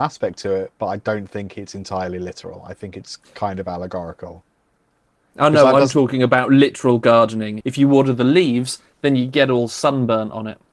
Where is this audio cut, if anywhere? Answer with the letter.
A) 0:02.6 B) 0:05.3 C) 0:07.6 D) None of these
C